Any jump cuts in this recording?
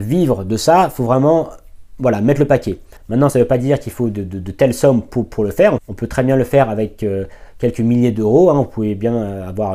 no; 0 cuts

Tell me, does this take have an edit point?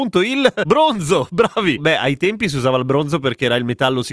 yes; 1 cut; at 1.8 s

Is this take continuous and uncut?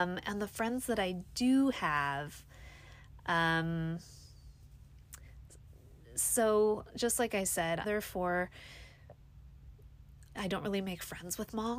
no; 2 cuts; at 7.8 s, 10.3 s

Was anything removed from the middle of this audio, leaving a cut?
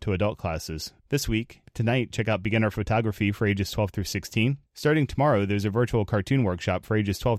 no; 0 cuts

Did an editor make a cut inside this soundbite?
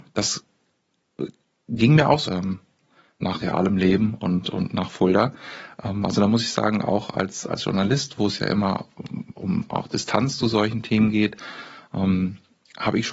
yes; 1 cut; at 2.3 s

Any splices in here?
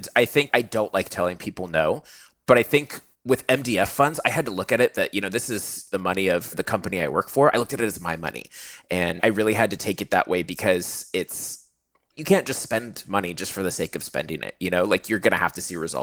no; 0 cuts

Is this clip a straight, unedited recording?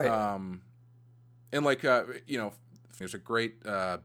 no; 1 cut; at 3.0 s

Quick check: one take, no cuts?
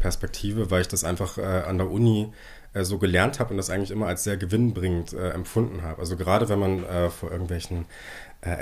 yes; 0 cuts

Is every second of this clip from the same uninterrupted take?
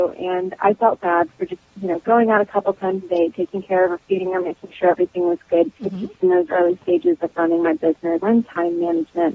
no; 2 cuts; at 5.8 s, 8.2 s

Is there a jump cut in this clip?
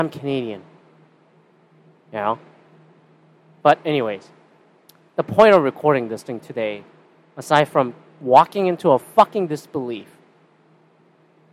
no; 0 cuts

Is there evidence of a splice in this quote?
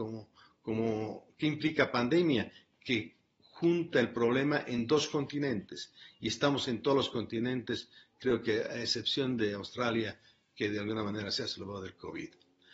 no; 0 cuts

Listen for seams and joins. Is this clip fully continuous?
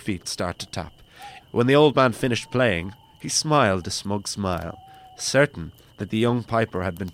no; 1 cut; at 1.4 s

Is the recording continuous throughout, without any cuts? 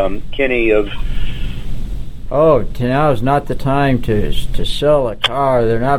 no; 1 cut; at 2.3 s

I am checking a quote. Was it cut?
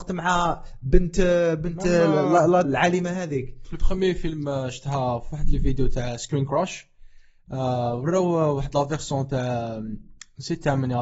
yes; 1 cut; at 2.6 s

